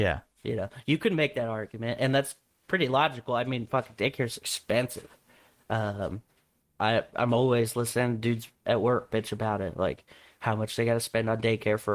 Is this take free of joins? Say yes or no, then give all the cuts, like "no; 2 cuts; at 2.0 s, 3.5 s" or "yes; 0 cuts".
no; 1 cut; at 6.6 s